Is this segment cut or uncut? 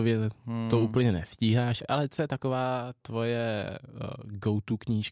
uncut